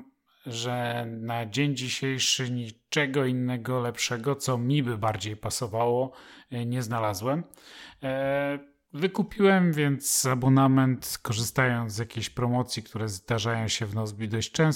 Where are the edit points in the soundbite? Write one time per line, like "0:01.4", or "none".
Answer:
none